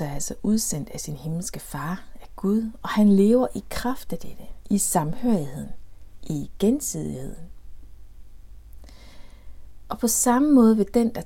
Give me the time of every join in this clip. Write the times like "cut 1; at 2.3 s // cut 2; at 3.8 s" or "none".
none

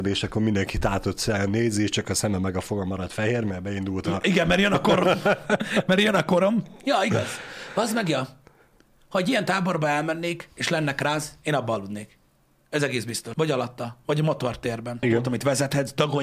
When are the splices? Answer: cut 1; at 13.3 s // cut 2; at 15.0 s

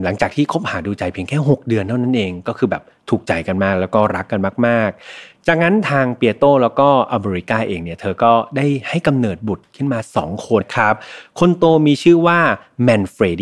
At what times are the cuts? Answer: cut 1; at 10.6 s

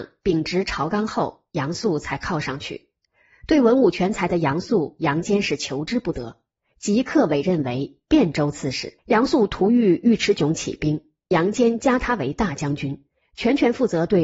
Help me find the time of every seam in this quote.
cut 1; at 9.0 s

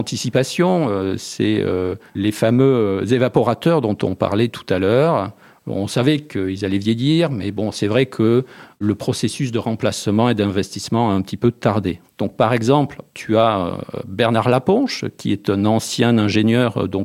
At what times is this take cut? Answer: cut 1; at 2.1 s // cut 2; at 12.0 s

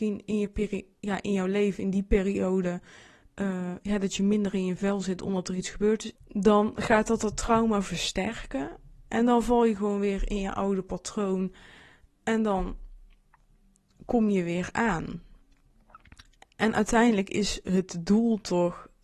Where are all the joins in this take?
cut 1; at 6.1 s

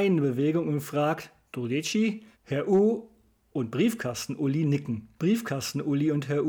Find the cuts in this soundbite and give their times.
cut 1; at 2.3 s // cut 2; at 5.2 s

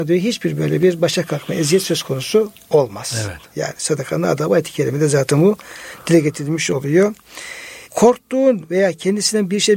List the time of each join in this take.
none

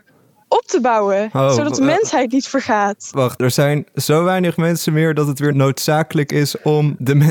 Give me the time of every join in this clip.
none

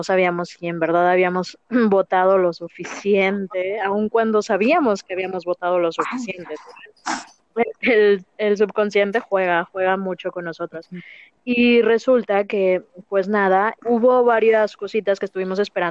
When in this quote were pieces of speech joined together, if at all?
cut 1; at 13.8 s

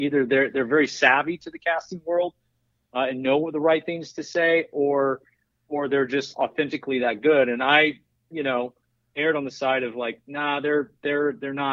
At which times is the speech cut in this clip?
none

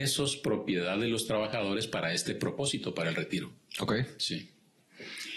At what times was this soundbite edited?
none

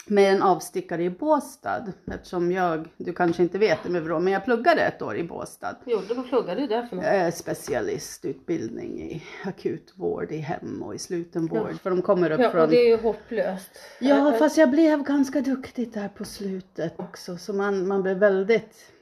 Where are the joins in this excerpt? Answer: cut 1; at 11.8 s // cut 2; at 17.0 s

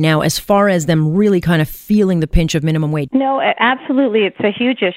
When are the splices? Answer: cut 1; at 3.1 s

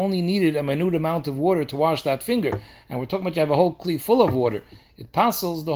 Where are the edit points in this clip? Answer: none

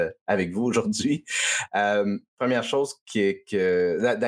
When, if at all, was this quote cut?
none

